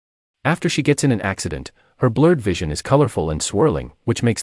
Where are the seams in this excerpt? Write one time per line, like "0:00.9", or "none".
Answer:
none

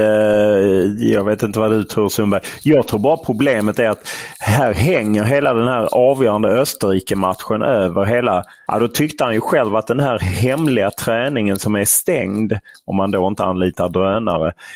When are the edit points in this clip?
0:08.7

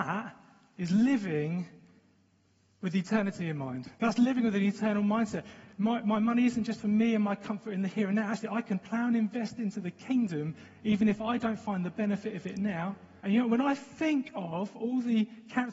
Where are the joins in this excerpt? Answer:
0:13.2

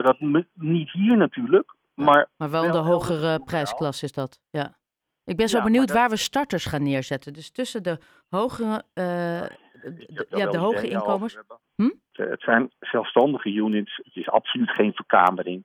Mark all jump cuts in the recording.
0:12.1

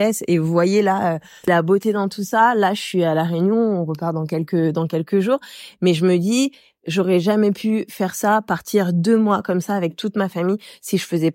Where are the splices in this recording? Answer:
none

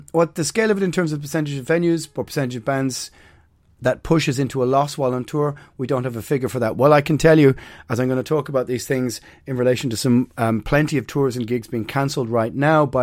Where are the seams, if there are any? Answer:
none

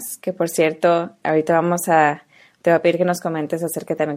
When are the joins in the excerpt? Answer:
0:01.2

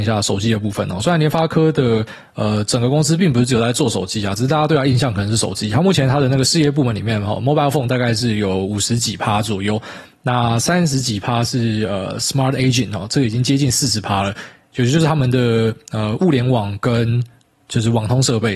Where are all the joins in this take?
none

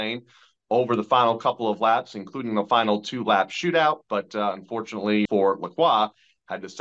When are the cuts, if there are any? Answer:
0:05.3

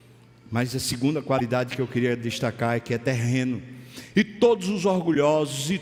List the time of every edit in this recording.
0:04.1

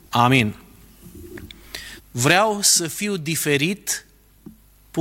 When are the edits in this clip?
0:02.0

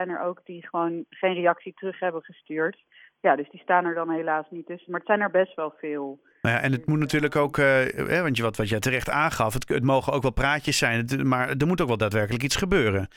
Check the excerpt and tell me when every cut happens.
none

